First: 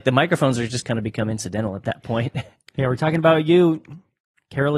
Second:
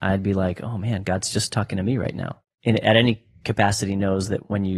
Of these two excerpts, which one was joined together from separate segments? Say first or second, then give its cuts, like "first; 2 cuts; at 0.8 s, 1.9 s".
second; 1 cut; at 2.4 s